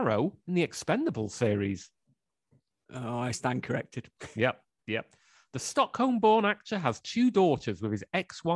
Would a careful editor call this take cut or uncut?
uncut